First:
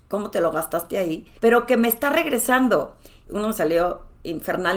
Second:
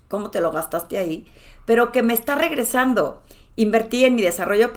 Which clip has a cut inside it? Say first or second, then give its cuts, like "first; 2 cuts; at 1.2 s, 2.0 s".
first; 2 cuts; at 1.4 s, 3.3 s